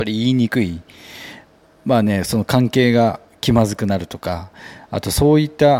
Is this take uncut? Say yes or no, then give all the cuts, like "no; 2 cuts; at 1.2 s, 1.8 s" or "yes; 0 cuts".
yes; 0 cuts